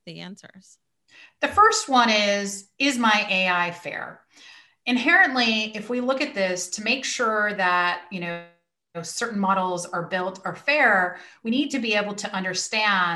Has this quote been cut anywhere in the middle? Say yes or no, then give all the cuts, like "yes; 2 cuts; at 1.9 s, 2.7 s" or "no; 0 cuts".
no; 0 cuts